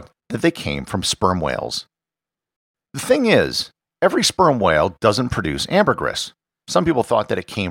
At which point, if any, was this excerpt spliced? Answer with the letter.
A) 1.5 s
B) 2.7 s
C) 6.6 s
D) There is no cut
C